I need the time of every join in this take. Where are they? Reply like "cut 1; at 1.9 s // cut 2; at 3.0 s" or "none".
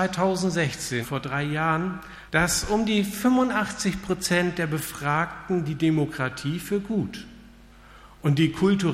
cut 1; at 1.0 s // cut 2; at 2.3 s